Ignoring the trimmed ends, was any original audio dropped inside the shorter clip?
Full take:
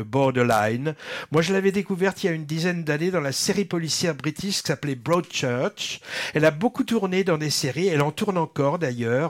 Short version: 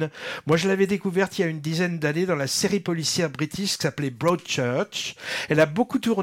no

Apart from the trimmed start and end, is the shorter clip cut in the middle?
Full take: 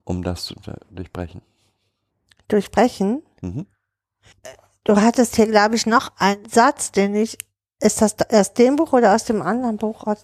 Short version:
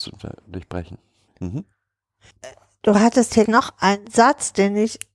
yes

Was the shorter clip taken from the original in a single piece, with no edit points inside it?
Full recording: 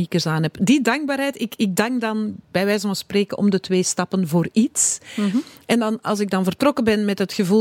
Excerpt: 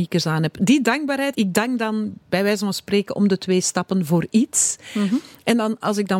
no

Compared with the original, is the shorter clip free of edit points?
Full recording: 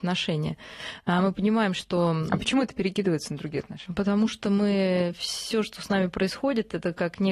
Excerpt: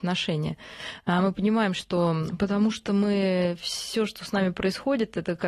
no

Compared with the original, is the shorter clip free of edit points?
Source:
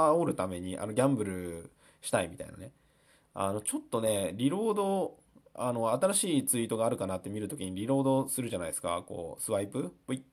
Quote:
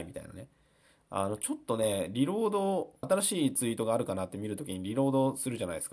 no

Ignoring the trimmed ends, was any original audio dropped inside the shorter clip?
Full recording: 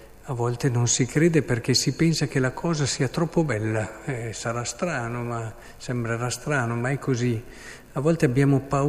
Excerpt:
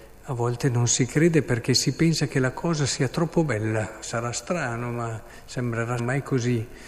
yes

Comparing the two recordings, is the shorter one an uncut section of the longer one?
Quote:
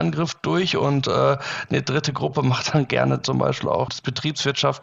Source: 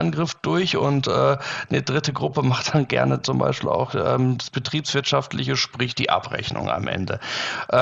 no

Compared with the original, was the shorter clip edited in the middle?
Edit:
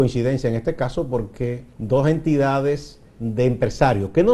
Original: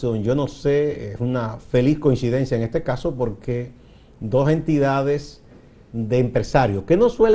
yes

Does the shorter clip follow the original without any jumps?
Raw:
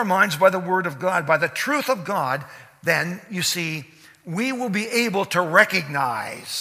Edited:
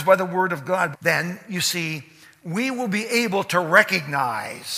no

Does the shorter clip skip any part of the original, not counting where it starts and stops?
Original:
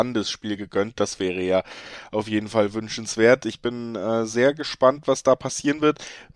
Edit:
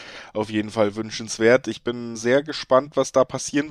yes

